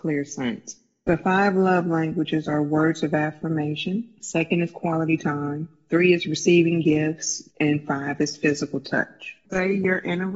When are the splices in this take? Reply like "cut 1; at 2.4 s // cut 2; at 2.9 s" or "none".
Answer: cut 1; at 7.5 s // cut 2; at 9.4 s